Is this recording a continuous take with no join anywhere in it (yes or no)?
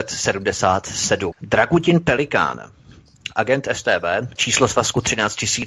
no